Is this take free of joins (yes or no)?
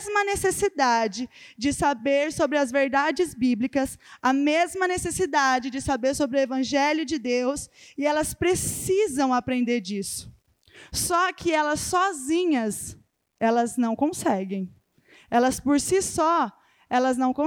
yes